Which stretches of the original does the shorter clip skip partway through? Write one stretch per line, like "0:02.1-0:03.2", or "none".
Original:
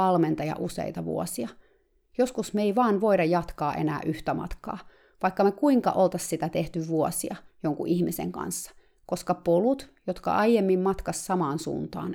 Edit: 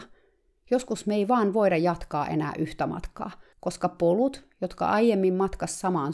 0:05.0-0:09.0